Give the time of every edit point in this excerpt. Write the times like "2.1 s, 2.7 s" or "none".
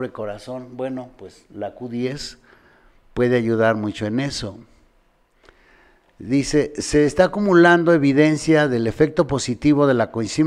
none